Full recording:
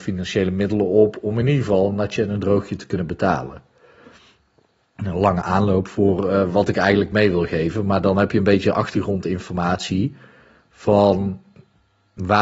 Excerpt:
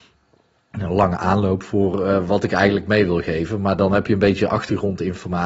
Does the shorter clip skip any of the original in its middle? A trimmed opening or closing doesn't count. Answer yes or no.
no